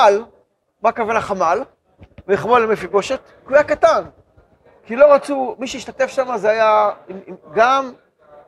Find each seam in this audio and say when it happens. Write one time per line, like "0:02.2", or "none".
0:04.8
0:07.4